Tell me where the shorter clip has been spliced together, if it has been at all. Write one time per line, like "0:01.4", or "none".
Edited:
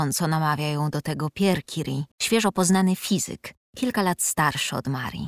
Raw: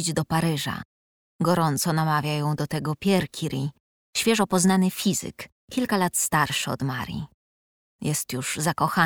0:02.1